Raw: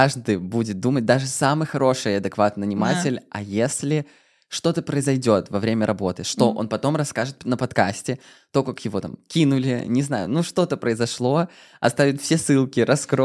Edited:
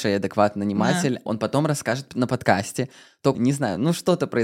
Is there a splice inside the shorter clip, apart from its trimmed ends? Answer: yes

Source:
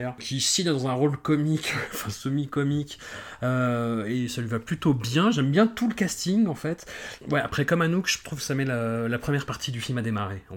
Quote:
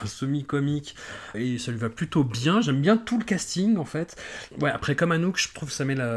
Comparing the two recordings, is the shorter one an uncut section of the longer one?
no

